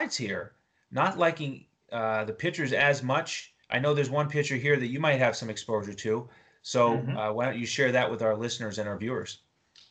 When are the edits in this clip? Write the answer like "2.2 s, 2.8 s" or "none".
3.6 s